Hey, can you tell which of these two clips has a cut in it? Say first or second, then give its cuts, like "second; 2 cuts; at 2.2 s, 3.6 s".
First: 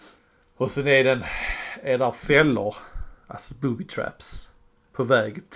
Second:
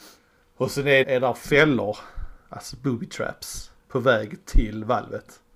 second; 2 cuts; at 1.0 s, 3.8 s